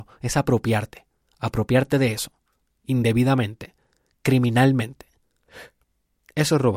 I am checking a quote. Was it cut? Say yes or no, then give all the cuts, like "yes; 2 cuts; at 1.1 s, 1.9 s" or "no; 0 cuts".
no; 0 cuts